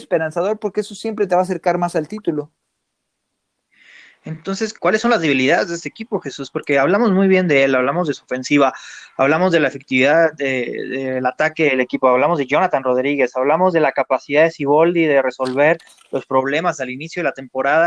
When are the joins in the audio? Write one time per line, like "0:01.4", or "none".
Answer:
0:04.8